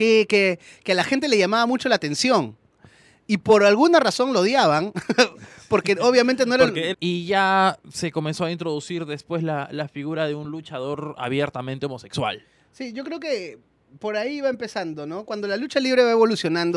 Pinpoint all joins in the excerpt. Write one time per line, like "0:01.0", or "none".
0:06.9